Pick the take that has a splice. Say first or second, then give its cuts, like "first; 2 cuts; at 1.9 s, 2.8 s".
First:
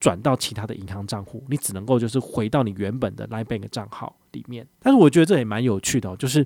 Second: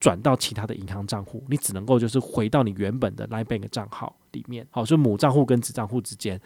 first; 1 cut; at 4.7 s